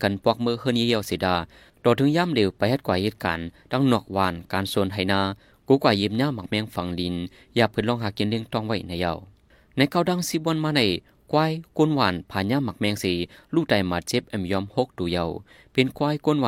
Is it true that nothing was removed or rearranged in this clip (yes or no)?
yes